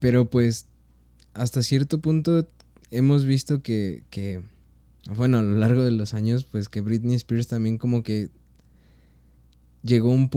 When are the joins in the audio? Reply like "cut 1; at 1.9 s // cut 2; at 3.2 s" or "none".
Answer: none